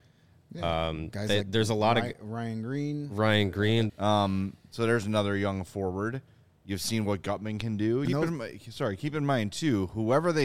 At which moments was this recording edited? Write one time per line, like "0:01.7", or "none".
0:03.9
0:08.0